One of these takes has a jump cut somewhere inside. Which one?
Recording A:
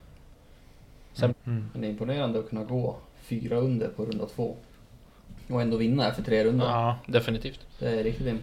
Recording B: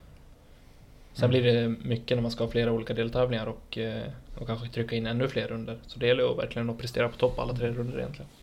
A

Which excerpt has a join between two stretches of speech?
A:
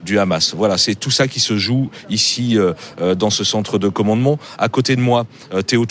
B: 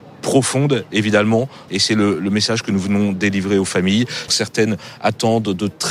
B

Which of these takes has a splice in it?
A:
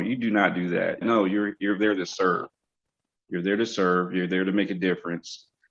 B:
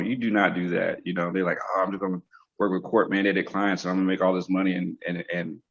A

